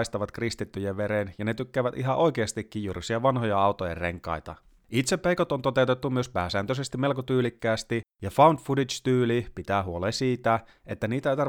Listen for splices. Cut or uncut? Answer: uncut